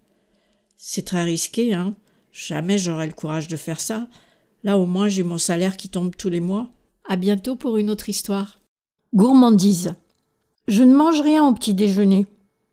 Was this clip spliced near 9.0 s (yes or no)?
yes